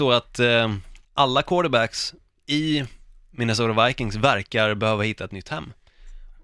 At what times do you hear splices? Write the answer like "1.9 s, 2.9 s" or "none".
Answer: 1.0 s